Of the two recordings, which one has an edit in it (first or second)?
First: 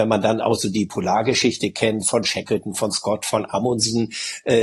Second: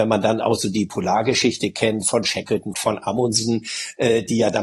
second